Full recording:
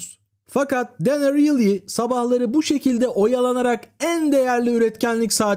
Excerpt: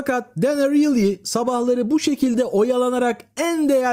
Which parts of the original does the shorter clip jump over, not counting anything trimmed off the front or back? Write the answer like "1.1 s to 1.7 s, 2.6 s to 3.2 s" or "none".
none